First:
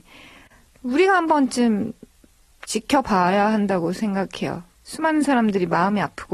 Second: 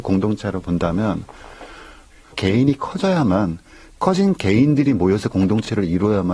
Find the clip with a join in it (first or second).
first